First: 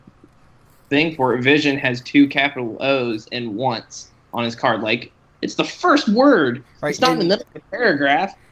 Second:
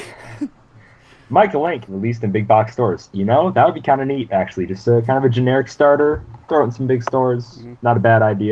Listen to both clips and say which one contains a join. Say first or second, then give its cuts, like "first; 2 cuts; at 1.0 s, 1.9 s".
second; 2 cuts; at 1.9 s, 6.4 s